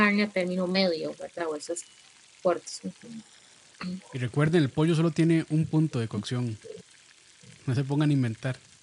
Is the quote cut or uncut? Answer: uncut